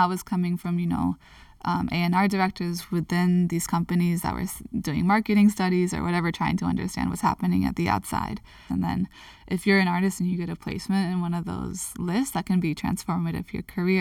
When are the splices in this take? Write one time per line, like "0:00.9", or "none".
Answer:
0:08.7